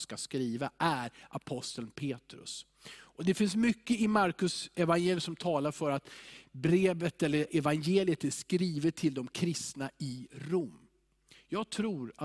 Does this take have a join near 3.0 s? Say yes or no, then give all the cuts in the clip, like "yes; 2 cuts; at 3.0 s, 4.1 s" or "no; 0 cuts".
no; 0 cuts